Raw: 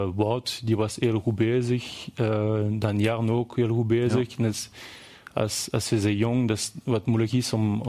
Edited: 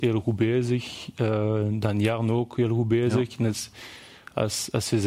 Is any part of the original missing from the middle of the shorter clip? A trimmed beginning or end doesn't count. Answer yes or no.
no